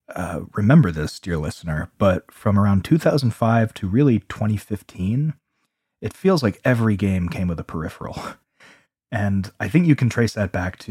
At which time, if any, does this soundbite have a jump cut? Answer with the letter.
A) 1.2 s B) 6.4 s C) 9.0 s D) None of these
D